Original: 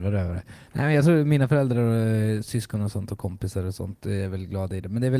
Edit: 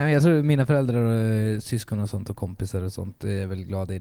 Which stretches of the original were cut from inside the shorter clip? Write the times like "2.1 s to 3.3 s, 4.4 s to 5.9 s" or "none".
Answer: none